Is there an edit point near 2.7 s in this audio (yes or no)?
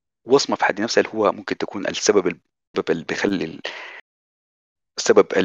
yes